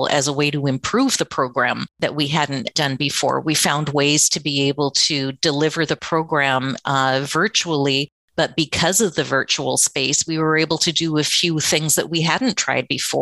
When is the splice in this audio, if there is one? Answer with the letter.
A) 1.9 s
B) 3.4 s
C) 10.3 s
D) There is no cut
A